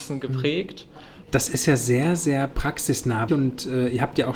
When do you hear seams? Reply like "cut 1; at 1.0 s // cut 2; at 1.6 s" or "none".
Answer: cut 1; at 1.2 s // cut 2; at 3.3 s